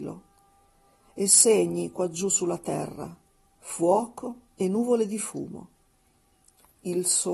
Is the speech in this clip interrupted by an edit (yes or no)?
yes